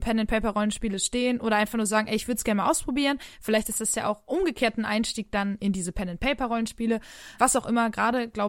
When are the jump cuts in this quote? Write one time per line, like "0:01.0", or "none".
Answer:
0:07.4